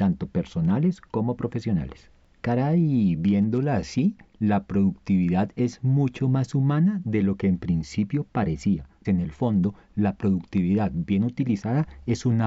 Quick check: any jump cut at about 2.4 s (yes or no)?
yes